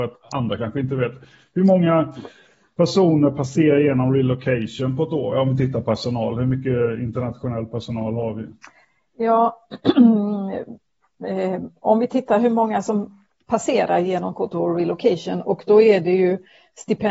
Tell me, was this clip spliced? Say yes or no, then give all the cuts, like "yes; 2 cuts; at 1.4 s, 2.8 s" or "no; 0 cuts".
no; 0 cuts